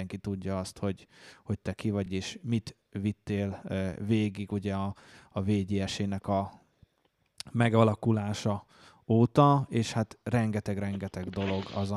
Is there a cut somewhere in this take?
no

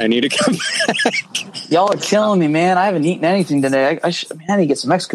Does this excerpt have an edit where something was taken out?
no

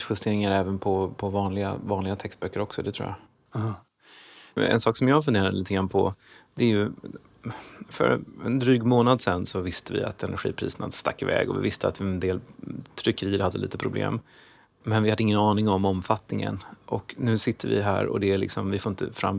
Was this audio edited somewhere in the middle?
no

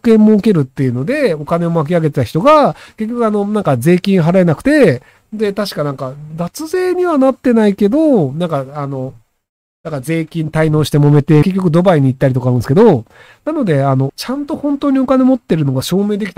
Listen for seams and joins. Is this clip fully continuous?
no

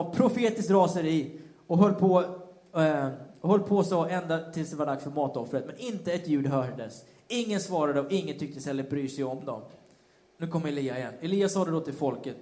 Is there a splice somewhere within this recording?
yes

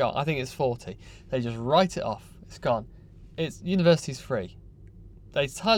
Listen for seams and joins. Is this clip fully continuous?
yes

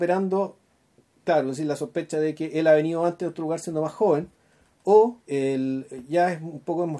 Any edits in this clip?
yes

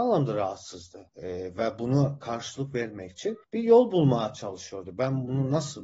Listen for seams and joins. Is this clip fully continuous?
yes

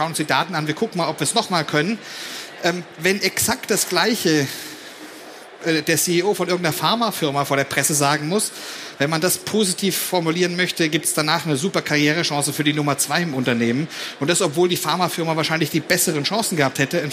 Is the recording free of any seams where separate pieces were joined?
yes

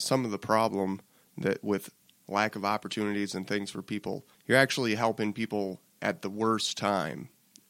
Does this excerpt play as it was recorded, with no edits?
yes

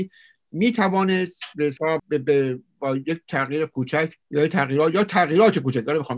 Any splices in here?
yes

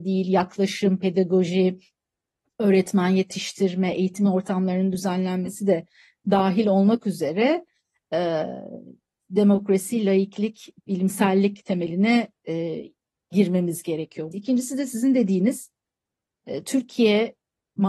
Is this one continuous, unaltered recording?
no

